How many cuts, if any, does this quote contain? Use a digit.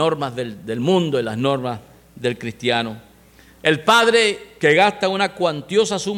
0